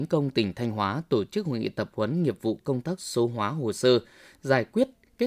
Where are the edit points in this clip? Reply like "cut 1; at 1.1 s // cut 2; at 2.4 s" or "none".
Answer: none

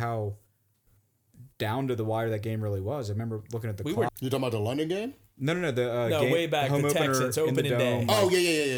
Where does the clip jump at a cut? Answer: cut 1; at 4.1 s

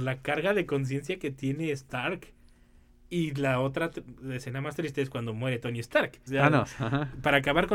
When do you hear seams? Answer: cut 1; at 6.3 s

